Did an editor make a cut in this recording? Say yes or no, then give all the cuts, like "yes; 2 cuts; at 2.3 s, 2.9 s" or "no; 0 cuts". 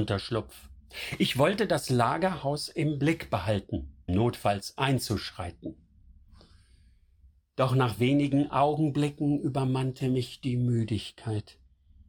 yes; 1 cut; at 4.1 s